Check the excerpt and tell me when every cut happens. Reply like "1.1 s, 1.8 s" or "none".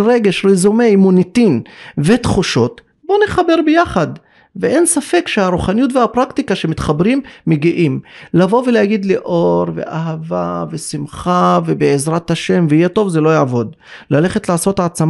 none